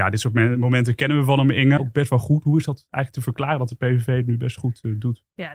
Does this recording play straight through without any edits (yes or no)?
no